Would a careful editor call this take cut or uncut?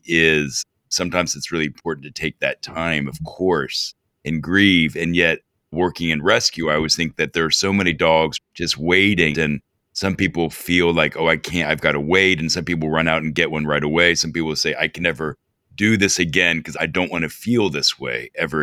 cut